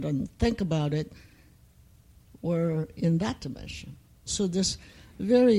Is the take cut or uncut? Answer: cut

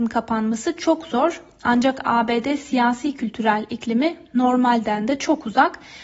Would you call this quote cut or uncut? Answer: uncut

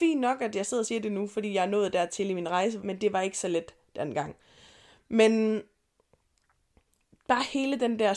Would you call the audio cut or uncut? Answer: cut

